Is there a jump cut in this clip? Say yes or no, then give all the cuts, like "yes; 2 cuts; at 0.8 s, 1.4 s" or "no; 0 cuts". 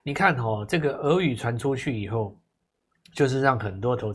no; 0 cuts